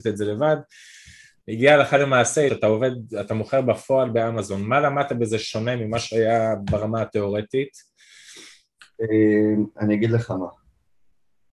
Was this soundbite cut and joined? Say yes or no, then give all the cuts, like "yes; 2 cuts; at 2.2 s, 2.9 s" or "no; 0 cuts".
yes; 1 cut; at 2.5 s